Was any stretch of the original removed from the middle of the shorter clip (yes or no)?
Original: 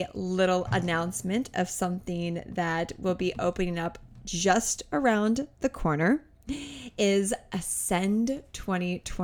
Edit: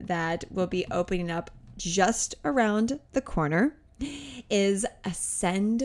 no